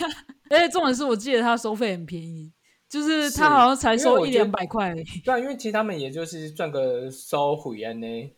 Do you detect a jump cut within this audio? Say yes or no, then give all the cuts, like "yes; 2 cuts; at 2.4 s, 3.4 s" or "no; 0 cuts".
no; 0 cuts